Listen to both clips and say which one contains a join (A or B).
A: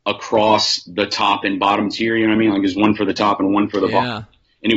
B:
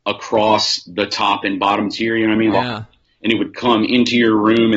B